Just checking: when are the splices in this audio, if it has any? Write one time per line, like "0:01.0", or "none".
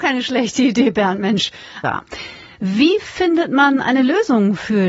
0:01.8